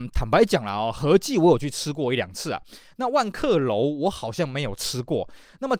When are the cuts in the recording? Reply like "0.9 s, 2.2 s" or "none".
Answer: none